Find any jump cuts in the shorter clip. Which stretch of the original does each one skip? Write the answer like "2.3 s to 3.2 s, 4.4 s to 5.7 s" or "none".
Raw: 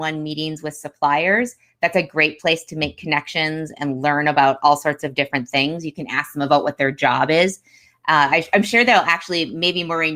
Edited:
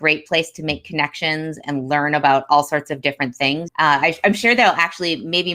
5.8 s to 8.0 s